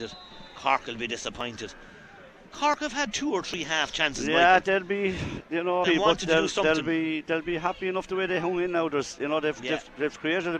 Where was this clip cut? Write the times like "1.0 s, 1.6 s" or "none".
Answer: 5.8 s